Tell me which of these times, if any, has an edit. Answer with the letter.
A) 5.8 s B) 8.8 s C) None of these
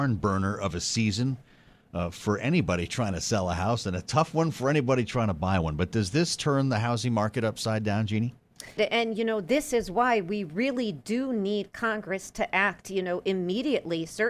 B